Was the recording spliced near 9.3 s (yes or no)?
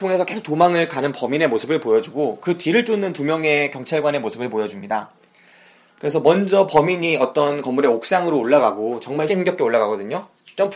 yes